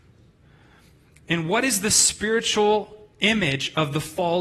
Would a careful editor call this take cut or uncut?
uncut